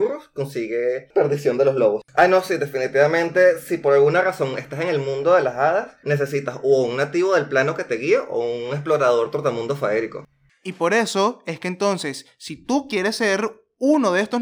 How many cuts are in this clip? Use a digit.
1